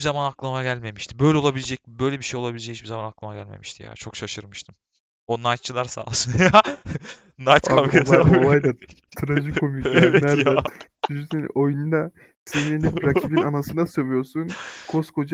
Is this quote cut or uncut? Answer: uncut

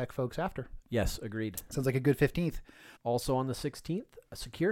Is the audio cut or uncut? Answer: cut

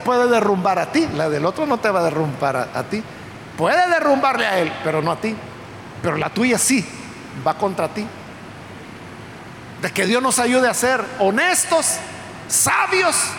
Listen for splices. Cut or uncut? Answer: uncut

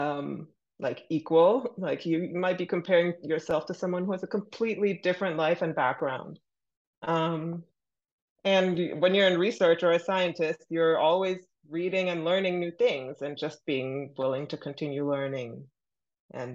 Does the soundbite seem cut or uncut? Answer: uncut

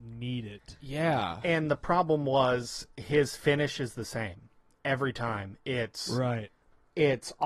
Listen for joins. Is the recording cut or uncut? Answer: uncut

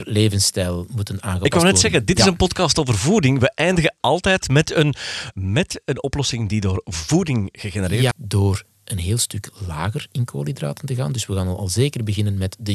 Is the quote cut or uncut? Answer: cut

